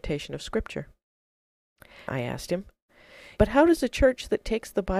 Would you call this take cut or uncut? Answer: cut